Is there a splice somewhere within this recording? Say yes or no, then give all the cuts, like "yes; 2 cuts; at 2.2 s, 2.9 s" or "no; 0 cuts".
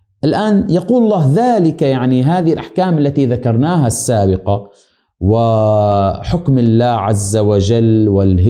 no; 0 cuts